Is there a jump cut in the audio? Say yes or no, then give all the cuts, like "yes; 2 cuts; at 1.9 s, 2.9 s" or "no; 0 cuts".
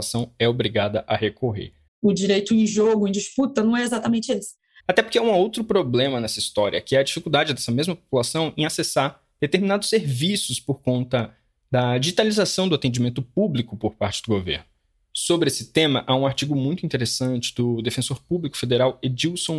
yes; 2 cuts; at 1.9 s, 4.8 s